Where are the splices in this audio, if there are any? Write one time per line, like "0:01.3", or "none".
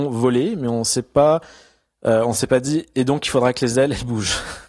none